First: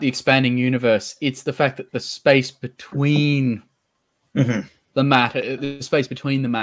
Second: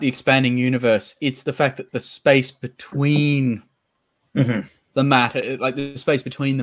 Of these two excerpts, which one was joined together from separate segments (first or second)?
first